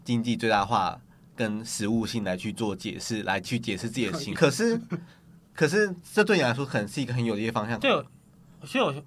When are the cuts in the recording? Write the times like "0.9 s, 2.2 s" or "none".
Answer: 4.4 s, 7.8 s

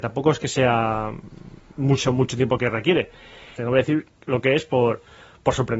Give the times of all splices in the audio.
3.6 s

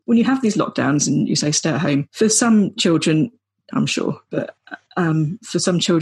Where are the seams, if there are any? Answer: 3.7 s

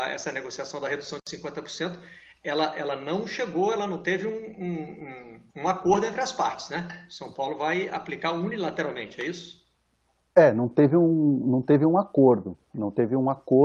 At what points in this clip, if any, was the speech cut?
5.5 s

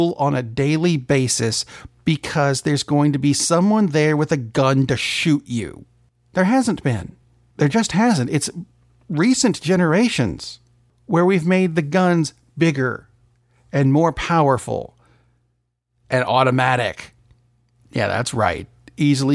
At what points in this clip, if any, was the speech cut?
none

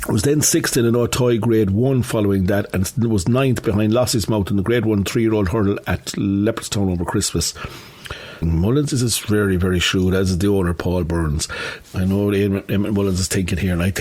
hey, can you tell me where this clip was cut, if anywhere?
8.4 s, 11.8 s

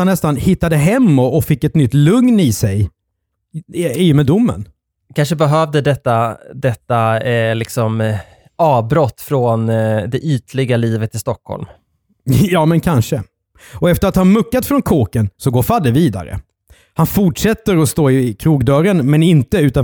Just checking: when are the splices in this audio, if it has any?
none

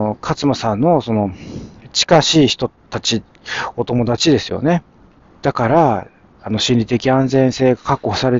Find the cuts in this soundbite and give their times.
5.2 s

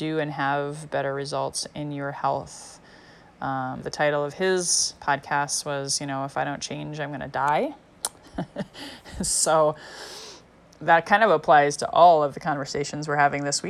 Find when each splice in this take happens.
3.8 s

